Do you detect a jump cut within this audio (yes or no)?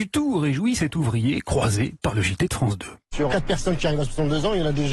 yes